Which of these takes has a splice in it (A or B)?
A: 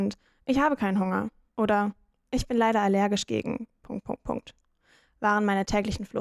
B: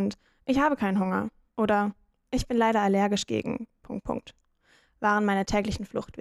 B